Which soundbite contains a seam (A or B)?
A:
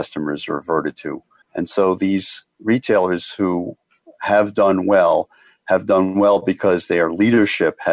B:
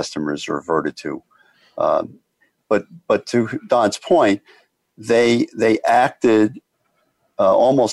A